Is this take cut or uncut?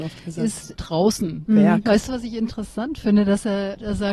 cut